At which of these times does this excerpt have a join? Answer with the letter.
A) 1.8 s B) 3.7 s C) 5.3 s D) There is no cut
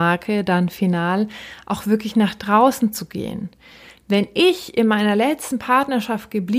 D